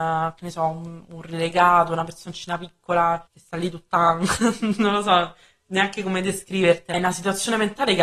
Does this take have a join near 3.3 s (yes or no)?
yes